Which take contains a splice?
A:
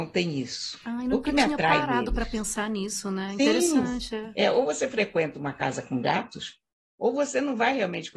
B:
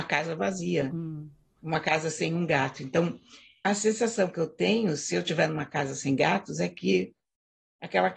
B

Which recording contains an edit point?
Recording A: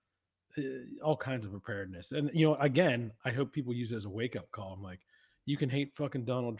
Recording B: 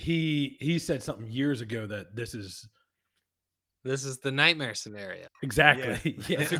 B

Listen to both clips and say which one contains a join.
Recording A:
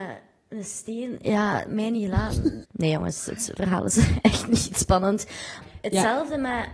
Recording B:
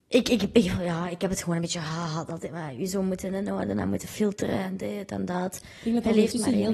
A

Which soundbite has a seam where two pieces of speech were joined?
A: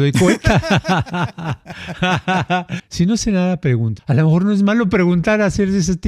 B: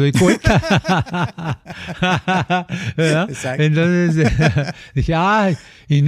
A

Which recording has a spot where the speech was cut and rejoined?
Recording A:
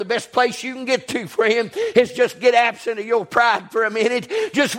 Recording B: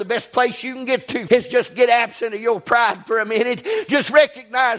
B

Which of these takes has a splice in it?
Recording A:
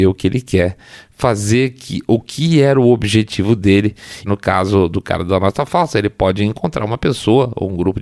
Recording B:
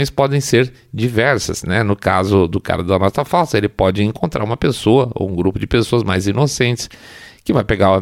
A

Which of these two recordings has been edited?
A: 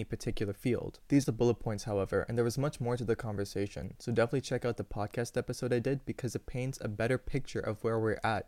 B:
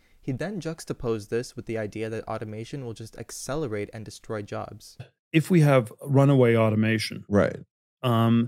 A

